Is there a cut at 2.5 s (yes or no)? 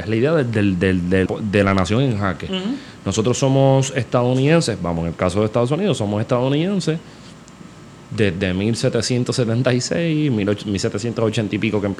no